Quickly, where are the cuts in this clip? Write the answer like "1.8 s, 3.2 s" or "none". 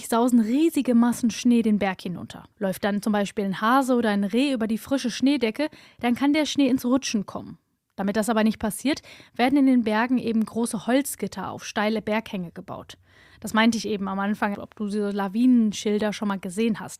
2.5 s, 14.5 s